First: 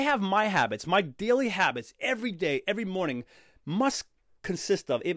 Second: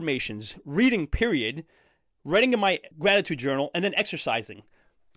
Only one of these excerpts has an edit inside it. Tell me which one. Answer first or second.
second